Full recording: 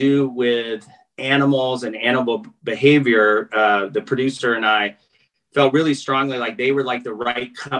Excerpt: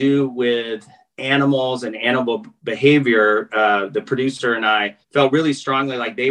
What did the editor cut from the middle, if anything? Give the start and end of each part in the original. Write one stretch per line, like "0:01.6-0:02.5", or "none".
0:05.0-0:05.4